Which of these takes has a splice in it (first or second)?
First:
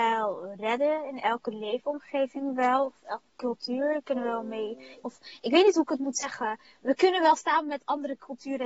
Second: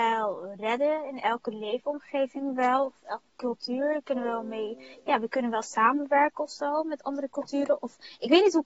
first